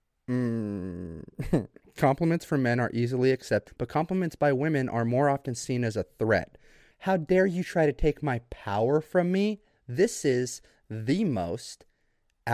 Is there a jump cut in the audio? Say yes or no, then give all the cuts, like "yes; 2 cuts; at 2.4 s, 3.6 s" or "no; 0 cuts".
yes; 2 cuts; at 3.7 s, 6.9 s